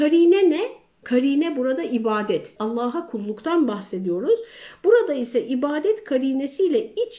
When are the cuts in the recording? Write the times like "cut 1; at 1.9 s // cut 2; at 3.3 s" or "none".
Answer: cut 1; at 2.6 s